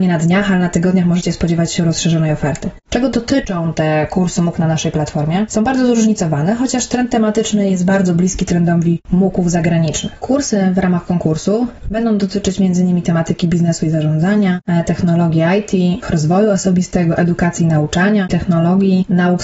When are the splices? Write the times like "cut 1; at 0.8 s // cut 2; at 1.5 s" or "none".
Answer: cut 1; at 16.0 s // cut 2; at 18.3 s